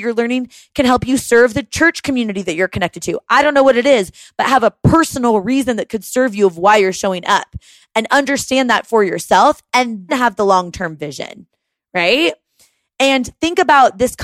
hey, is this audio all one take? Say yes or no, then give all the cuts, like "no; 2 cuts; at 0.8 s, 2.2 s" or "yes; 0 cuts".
no; 1 cut; at 10.1 s